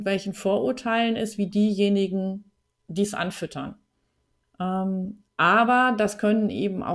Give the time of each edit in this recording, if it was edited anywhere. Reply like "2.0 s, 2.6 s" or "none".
4.4 s

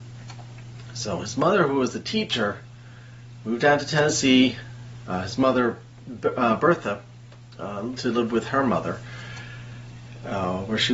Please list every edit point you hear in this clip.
none

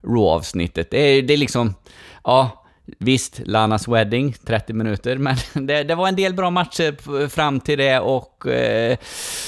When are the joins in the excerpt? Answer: none

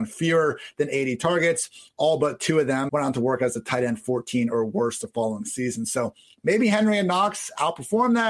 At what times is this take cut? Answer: 2.9 s

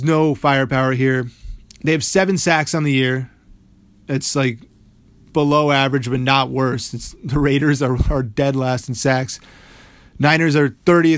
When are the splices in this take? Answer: none

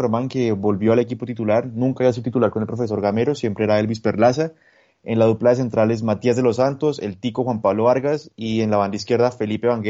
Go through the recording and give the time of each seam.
none

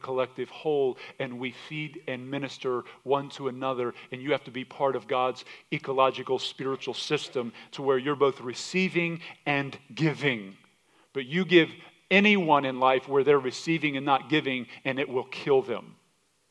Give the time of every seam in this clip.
none

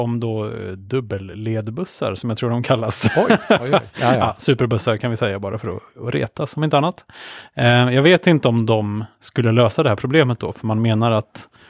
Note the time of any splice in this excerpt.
none

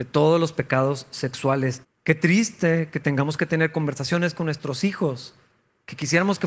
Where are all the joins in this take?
1.8 s

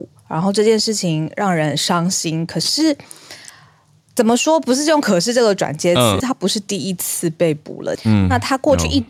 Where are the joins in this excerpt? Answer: 6.2 s, 8.0 s

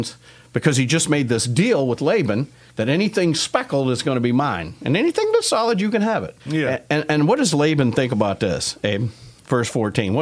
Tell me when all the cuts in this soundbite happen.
6.4 s

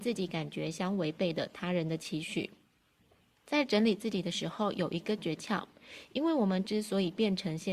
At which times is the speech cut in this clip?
none

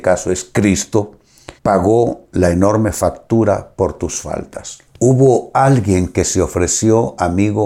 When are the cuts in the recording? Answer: 1.6 s, 4.9 s

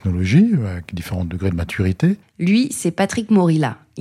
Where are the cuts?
2.2 s

